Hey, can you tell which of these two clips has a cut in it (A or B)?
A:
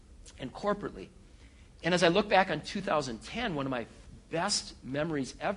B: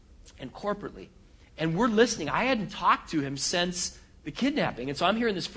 B